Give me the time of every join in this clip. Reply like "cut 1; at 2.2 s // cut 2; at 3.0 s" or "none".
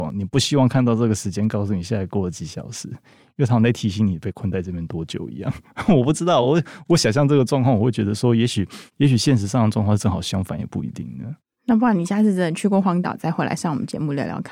none